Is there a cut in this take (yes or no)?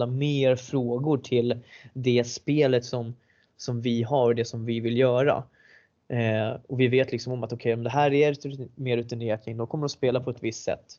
no